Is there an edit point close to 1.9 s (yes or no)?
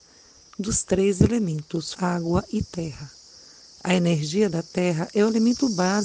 yes